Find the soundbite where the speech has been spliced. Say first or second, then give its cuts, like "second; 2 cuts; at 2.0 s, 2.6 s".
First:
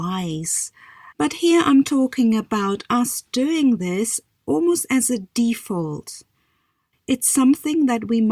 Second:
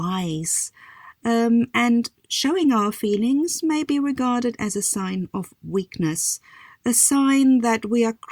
first; 2 cuts; at 1.1 s, 6.9 s